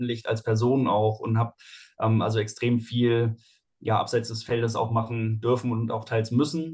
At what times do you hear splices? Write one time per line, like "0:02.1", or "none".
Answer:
none